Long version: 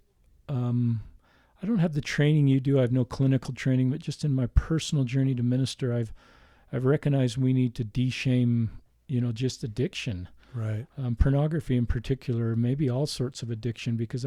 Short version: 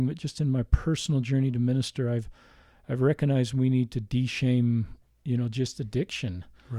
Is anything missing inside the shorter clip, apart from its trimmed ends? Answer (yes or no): no